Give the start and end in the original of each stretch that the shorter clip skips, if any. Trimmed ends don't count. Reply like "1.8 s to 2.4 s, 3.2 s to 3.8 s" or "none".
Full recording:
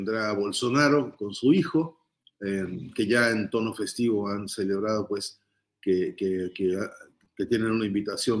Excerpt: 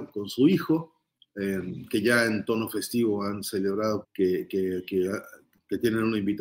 5.1 s to 5.7 s